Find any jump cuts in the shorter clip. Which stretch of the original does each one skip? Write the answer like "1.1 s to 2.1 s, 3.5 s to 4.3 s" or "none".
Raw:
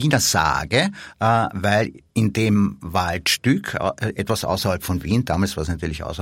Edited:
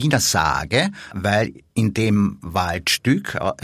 1.1 s to 1.5 s